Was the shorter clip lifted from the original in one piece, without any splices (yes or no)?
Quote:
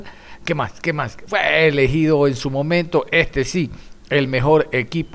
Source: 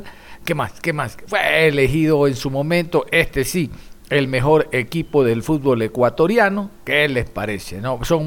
yes